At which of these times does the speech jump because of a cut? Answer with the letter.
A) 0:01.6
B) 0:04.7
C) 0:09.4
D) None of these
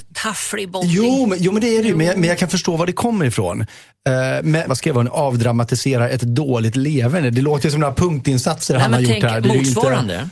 B